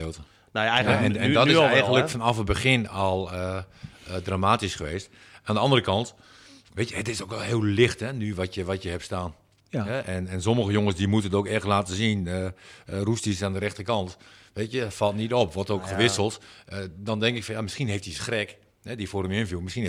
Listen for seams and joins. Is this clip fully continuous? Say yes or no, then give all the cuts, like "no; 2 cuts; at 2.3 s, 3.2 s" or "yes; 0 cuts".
yes; 0 cuts